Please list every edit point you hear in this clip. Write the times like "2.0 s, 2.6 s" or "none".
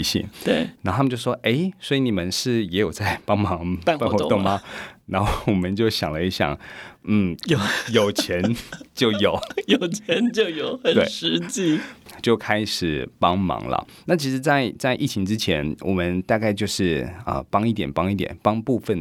7.4 s